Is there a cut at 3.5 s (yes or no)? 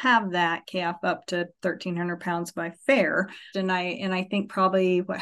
yes